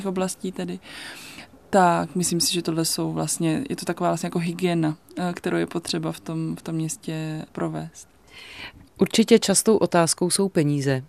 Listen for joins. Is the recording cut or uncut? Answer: uncut